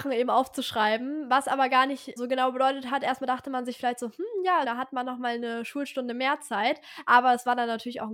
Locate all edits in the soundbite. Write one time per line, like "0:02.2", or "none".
0:02.2
0:04.6